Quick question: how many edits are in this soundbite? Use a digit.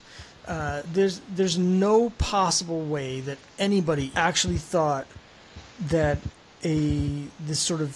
1